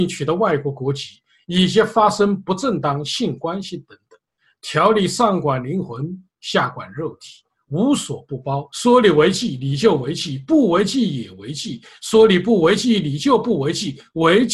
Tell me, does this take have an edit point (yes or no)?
no